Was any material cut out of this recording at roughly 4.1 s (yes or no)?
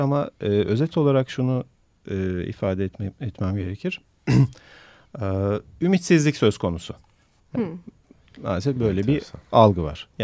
no